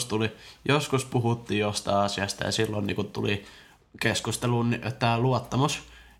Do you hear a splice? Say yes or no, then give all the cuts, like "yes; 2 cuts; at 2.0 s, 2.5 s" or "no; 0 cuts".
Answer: no; 0 cuts